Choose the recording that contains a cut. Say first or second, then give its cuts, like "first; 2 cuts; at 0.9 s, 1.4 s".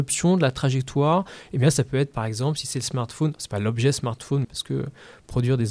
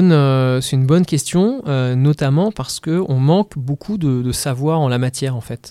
first; 1 cut; at 4.4 s